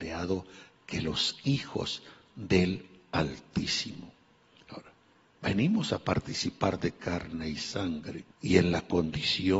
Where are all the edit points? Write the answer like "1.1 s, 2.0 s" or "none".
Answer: 8.3 s